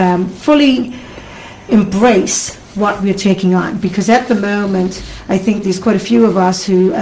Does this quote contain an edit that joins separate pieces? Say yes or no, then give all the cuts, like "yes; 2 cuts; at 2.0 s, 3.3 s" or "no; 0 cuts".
yes; 1 cut; at 1.7 s